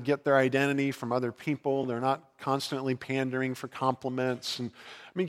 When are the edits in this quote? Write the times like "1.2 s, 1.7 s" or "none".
none